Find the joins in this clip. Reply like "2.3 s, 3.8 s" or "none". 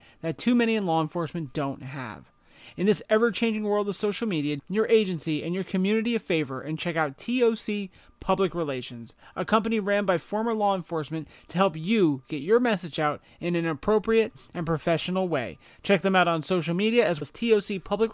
4.6 s, 17.2 s

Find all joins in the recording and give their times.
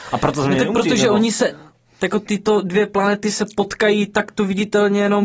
none

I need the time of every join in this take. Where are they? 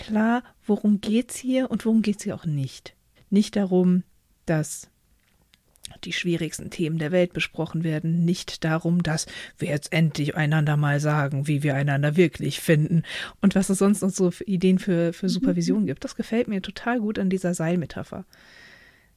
3.2 s

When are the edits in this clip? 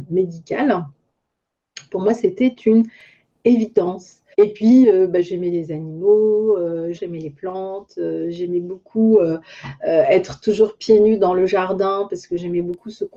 4.3 s, 7.0 s

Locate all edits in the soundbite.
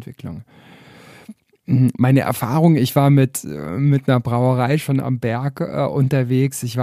none

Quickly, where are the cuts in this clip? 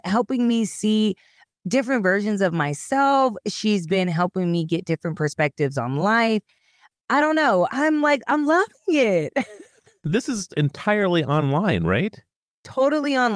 none

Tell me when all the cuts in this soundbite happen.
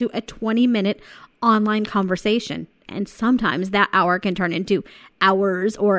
2.9 s

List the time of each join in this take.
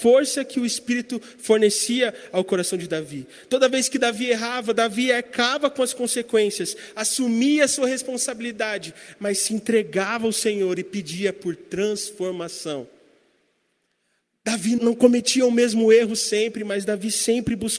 14.8 s

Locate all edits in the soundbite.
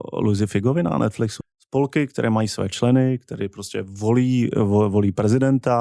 1.4 s

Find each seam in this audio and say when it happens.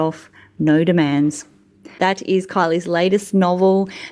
2.0 s

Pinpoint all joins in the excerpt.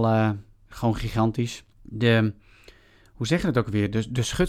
1.7 s

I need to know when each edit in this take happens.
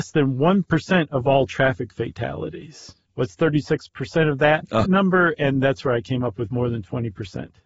3.1 s, 4.8 s

